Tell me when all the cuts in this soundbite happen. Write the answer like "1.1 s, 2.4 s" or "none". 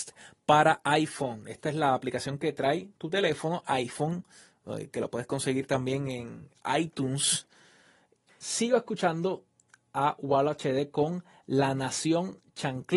8.3 s